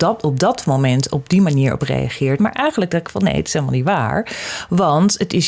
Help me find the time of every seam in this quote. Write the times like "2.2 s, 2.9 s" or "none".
2.4 s

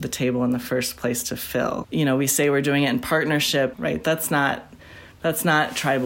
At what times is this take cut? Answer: 1.8 s, 3.7 s

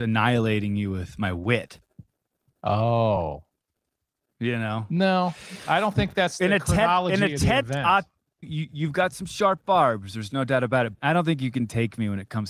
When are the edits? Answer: 8.4 s, 10.9 s

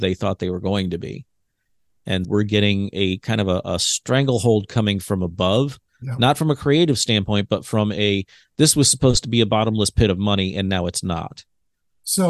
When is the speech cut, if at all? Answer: 2.2 s

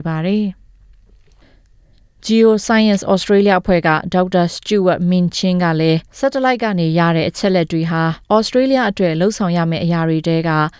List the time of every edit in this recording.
6.1 s, 8.2 s

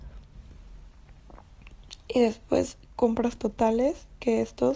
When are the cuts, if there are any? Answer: none

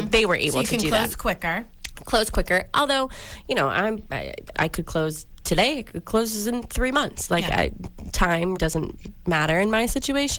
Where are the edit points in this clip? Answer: 4.5 s, 8.6 s

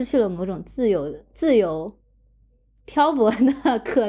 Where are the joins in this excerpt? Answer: none

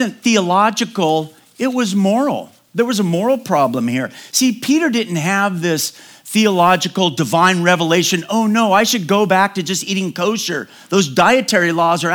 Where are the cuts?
none

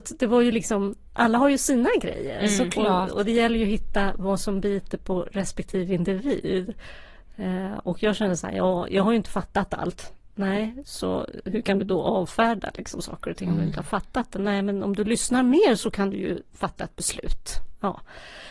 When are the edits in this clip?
none

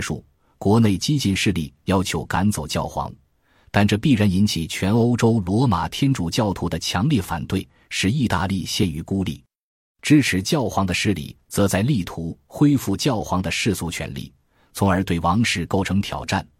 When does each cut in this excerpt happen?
none

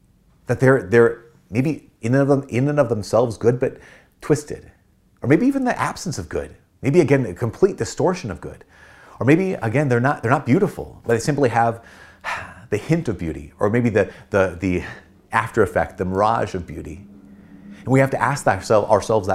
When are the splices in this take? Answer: none

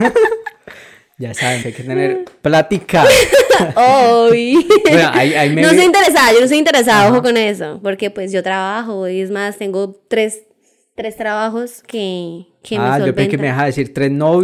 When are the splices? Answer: 1.6 s

